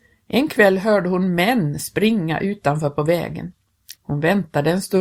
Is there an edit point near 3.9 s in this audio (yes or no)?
yes